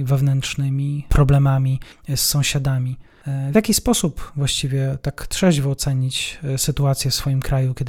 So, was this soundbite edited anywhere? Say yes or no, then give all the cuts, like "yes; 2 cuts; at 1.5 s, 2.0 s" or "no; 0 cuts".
no; 0 cuts